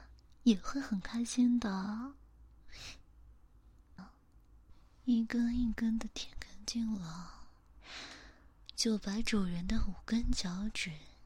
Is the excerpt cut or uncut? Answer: cut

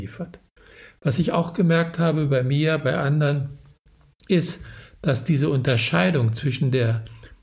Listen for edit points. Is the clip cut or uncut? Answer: uncut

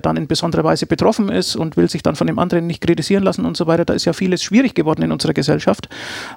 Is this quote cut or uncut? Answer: uncut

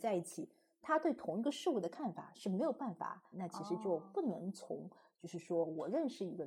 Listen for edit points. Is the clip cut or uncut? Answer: cut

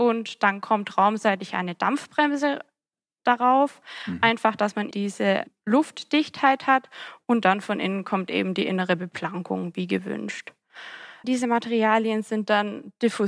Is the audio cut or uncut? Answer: cut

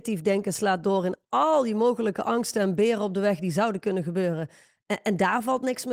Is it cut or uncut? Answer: uncut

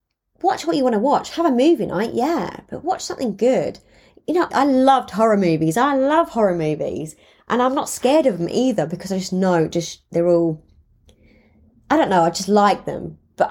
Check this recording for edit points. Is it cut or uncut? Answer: cut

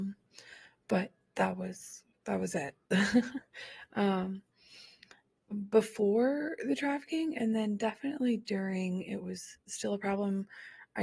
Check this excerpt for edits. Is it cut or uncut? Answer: cut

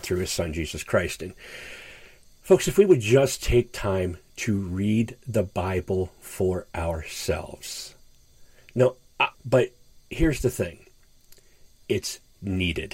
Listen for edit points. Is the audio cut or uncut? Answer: cut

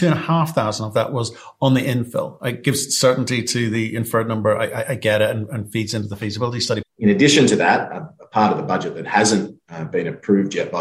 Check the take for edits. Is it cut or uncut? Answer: cut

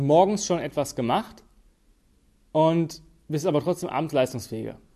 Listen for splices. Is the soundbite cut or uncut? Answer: uncut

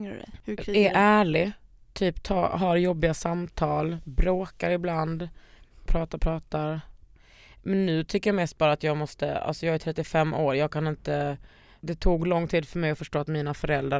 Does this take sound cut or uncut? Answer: cut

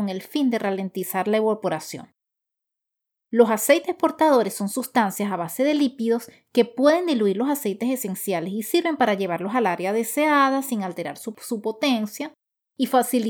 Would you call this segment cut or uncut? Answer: uncut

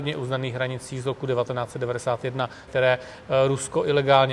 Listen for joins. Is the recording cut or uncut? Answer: cut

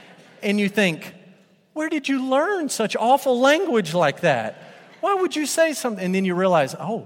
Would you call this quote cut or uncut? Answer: uncut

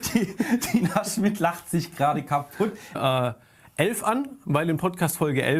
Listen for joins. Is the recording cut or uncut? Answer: cut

